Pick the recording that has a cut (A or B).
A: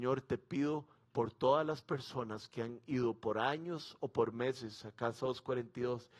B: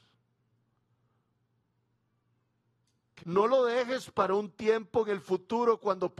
B